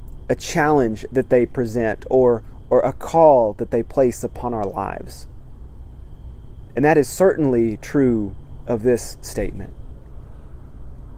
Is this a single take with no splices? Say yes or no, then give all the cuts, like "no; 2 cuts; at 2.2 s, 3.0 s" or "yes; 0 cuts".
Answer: yes; 0 cuts